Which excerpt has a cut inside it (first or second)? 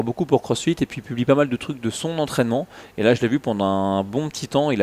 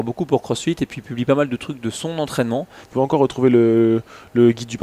second